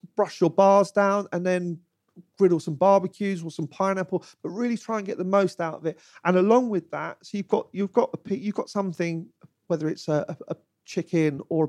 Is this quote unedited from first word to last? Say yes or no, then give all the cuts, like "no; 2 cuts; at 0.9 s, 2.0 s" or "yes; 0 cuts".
yes; 0 cuts